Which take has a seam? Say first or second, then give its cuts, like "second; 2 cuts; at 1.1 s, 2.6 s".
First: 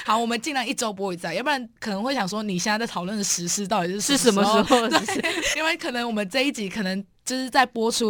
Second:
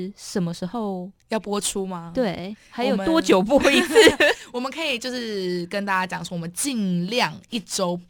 first; 2 cuts; at 1.8 s, 5.5 s